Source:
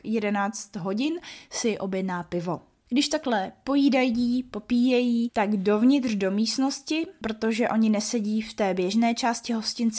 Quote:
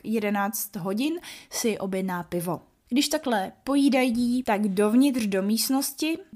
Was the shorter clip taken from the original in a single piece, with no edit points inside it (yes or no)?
no